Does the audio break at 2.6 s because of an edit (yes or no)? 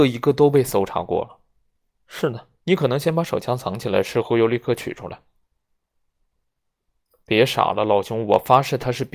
yes